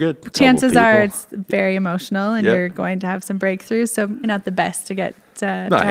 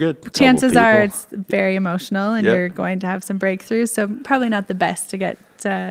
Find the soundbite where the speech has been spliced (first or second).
first